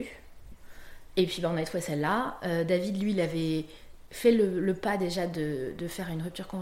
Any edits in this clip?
no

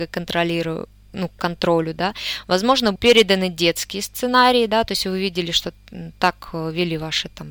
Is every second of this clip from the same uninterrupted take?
no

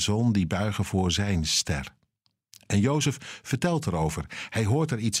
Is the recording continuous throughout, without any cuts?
yes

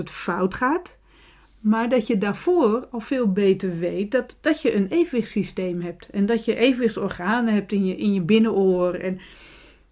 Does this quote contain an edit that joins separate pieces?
no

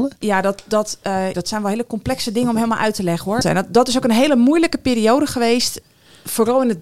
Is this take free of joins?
no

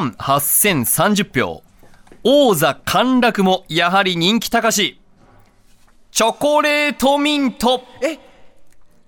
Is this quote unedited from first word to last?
yes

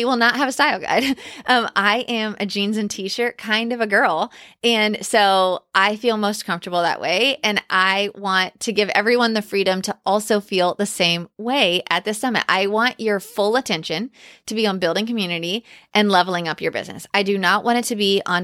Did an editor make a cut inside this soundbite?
no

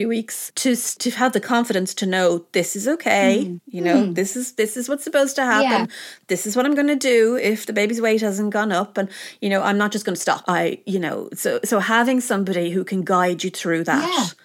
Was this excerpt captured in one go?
yes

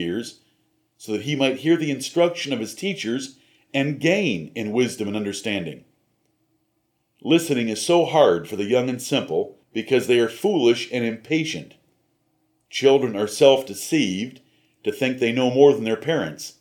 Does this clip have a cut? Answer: yes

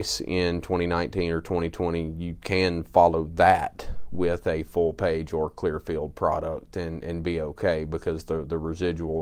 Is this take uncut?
yes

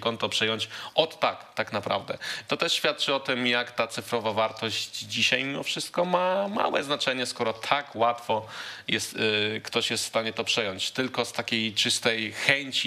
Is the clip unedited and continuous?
yes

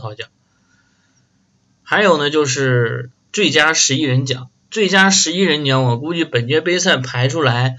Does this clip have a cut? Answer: no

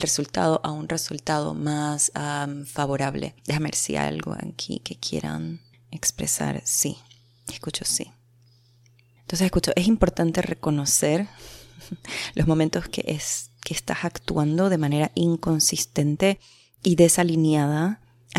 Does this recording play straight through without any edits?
yes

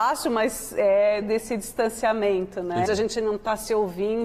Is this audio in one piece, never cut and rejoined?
no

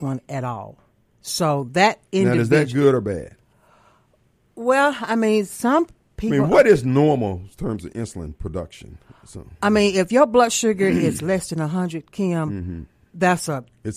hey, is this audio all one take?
yes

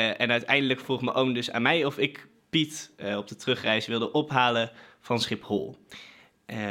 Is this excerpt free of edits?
yes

